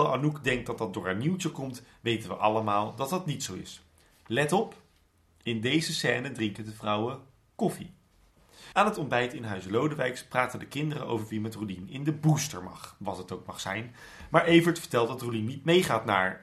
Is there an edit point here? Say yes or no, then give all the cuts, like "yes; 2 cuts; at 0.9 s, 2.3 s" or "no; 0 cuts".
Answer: no; 0 cuts